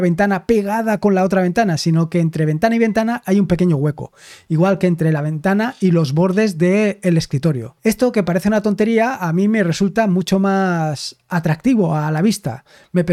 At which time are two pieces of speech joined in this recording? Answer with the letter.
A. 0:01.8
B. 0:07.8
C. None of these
B